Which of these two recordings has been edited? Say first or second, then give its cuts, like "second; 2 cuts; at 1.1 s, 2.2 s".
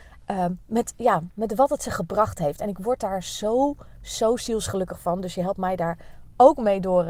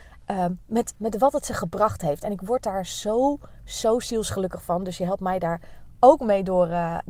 second; 1 cut; at 0.9 s